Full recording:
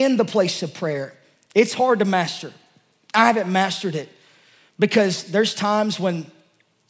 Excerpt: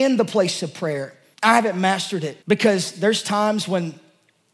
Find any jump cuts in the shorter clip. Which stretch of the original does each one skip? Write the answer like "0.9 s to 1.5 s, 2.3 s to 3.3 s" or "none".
1.3 s to 3.1 s, 4.1 s to 4.7 s